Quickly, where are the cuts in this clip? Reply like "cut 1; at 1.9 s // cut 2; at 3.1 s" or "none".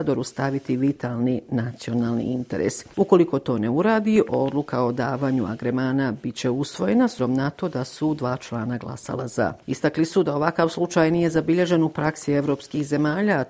cut 1; at 7.2 s // cut 2; at 9.6 s